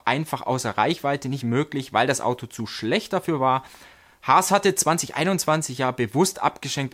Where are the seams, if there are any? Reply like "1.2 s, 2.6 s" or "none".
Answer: 1.4 s